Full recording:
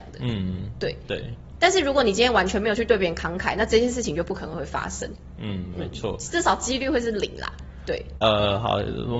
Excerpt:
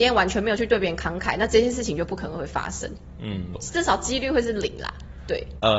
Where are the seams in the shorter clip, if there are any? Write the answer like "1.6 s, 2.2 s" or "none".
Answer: 3.5 s